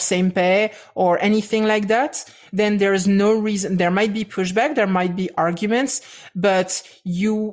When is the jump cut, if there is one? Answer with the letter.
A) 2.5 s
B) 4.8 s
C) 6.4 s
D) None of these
D